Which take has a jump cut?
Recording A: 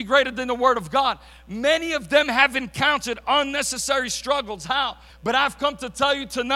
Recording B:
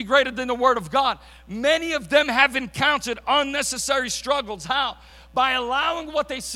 A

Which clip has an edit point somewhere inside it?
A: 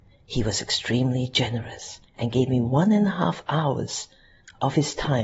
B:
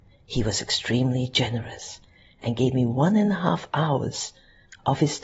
A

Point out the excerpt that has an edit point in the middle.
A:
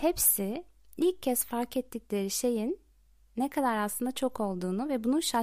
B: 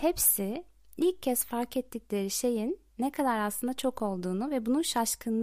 B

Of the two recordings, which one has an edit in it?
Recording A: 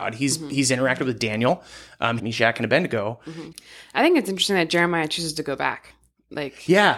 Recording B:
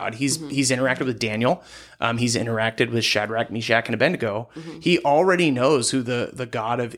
A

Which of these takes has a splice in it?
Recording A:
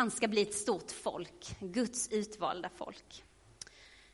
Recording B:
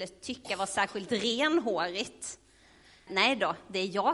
B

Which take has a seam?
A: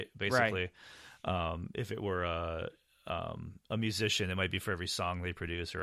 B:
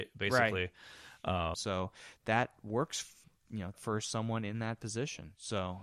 B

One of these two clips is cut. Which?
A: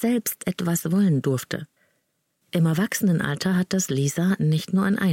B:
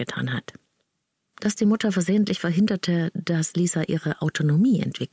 A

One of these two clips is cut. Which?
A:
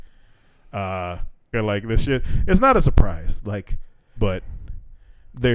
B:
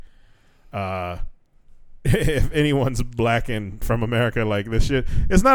A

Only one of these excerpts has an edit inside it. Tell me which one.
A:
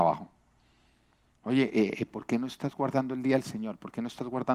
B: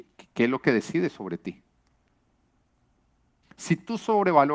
B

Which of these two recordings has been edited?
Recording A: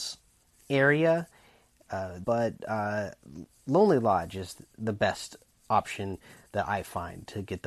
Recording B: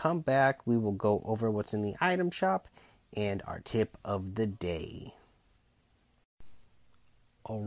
A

